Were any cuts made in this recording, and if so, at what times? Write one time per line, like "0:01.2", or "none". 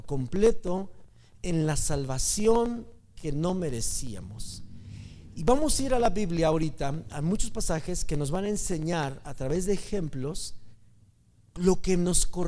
none